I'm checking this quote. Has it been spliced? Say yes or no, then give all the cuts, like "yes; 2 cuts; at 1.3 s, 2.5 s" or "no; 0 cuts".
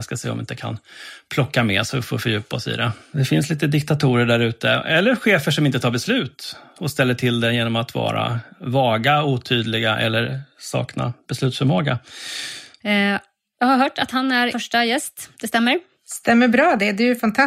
yes; 3 cuts; at 3.1 s, 12.8 s, 14.5 s